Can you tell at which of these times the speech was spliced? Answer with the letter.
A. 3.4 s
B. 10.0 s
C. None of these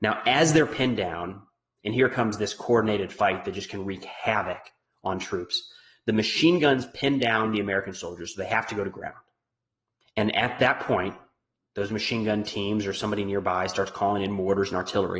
B